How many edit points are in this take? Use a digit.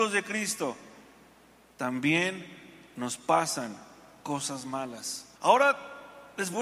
1